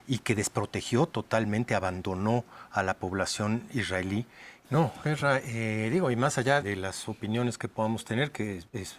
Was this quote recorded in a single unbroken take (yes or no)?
no